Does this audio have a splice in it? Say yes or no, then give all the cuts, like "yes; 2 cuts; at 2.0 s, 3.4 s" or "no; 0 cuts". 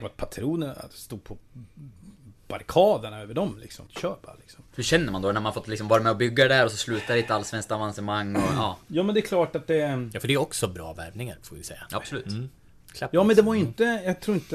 yes; 1 cut; at 3.9 s